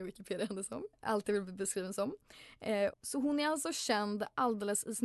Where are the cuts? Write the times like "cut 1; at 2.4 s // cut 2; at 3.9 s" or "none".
cut 1; at 0.9 s // cut 2; at 2.9 s